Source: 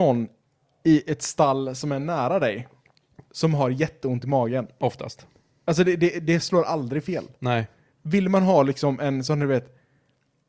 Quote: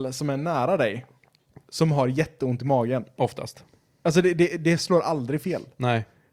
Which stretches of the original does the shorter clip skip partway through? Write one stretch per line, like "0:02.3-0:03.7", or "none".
none